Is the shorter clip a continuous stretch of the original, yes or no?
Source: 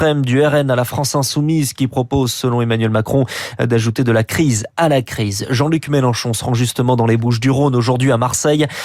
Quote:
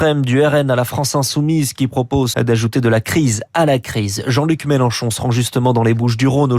no